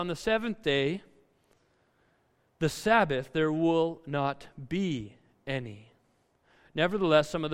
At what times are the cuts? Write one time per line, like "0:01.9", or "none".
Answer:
none

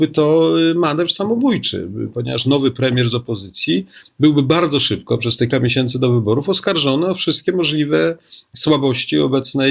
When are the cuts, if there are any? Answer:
0:05.5

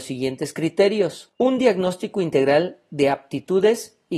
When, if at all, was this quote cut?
none

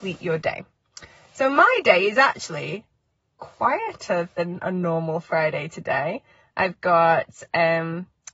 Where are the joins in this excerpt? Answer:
none

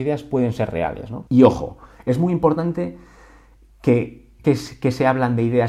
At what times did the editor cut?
0:01.3
0:04.4

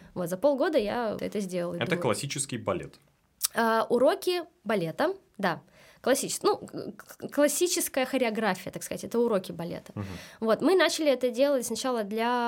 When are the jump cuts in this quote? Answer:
0:01.2

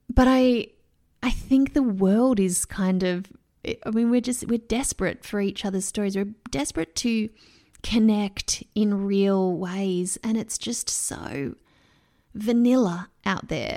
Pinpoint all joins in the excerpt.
none

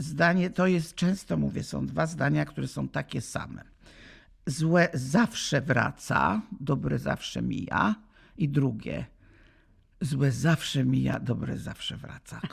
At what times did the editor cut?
none

